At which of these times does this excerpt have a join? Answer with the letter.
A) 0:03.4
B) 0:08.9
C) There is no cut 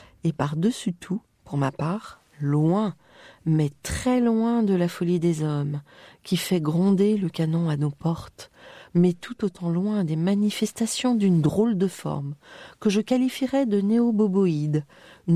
B